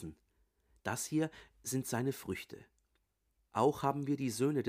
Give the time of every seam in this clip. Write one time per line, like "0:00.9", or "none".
0:03.4